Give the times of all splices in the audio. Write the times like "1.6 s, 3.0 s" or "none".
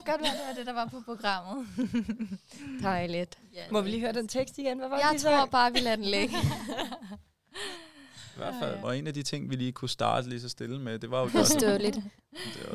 8.8 s, 11.3 s